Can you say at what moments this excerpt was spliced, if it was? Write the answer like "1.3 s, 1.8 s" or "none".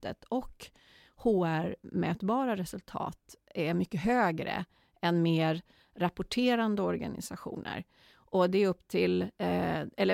none

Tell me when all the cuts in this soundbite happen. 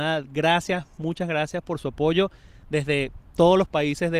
3.3 s

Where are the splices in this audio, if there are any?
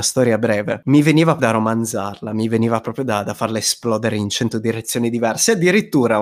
1.4 s

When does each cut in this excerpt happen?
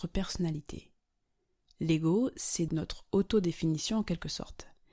2.7 s

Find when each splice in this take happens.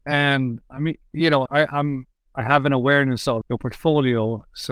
1.5 s, 3.4 s

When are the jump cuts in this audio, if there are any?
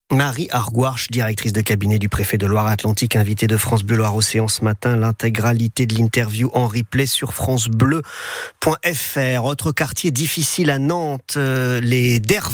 none

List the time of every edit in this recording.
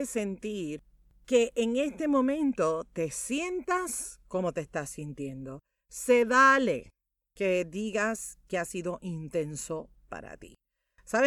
none

